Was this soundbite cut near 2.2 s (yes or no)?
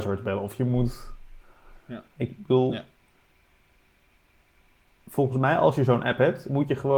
yes